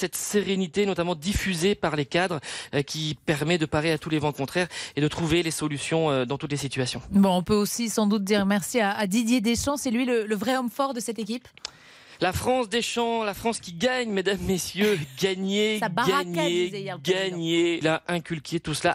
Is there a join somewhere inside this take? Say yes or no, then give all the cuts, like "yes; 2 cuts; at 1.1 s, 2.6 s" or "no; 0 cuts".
yes; 1 cut; at 17.8 s